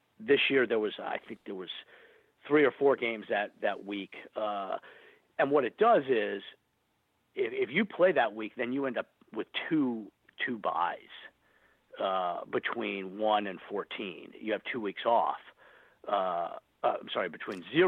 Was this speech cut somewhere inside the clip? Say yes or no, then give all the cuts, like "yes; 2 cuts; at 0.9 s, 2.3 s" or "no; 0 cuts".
no; 0 cuts